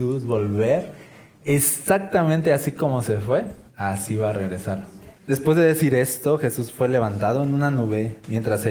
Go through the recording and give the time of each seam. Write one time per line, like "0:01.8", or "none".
0:05.2